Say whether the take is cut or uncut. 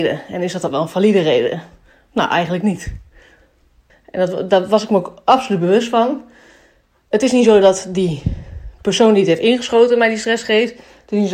cut